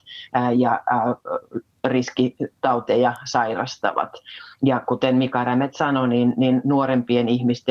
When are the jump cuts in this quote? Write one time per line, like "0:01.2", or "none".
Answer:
none